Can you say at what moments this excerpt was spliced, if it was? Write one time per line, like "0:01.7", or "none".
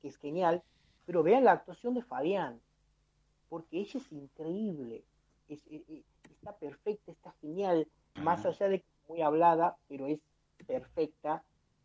0:05.4
0:08.2